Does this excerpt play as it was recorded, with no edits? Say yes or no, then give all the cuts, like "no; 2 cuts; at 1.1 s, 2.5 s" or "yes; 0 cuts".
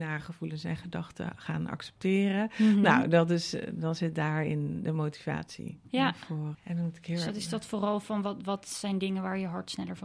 no; 1 cut; at 6.5 s